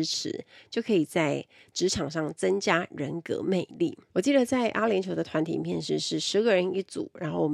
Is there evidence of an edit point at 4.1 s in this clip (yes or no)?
yes